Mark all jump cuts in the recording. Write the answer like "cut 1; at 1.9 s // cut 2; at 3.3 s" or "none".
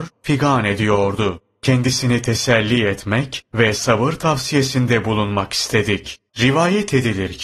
cut 1; at 6.3 s